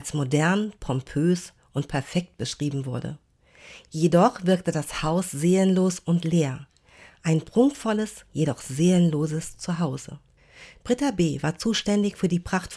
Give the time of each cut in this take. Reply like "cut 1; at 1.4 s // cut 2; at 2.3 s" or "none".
none